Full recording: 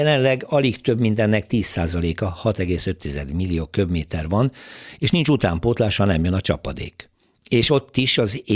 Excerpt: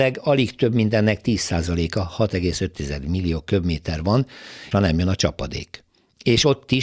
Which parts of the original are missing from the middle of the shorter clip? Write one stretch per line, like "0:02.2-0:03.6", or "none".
0:05.0-0:06.0